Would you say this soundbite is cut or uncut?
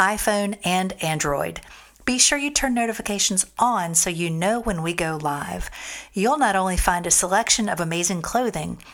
uncut